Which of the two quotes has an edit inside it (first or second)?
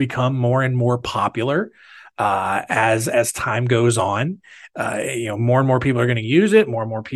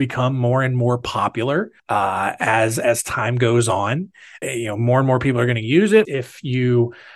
second